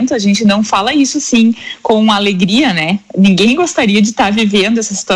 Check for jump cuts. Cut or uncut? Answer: uncut